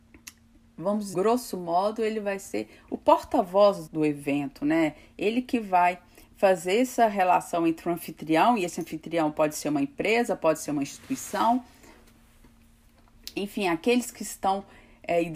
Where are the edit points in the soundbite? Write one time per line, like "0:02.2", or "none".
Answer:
0:01.1
0:03.9